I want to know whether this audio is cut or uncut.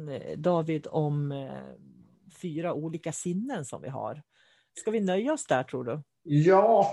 uncut